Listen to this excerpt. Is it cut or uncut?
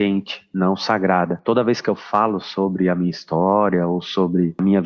uncut